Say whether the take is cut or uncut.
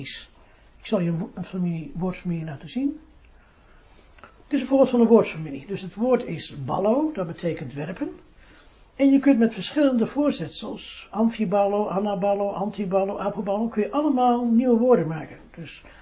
uncut